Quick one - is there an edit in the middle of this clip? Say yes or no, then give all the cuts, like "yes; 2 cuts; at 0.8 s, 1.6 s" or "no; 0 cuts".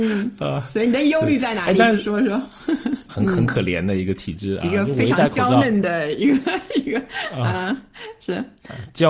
yes; 1 cut; at 3.1 s